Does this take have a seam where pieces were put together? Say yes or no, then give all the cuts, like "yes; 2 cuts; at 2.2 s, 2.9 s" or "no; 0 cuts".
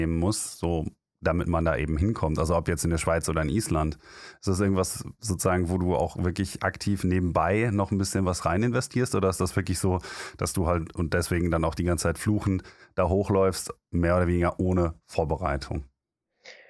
no; 0 cuts